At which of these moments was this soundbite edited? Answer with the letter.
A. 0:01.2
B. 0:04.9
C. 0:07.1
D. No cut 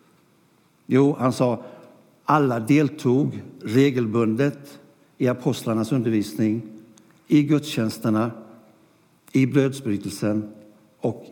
D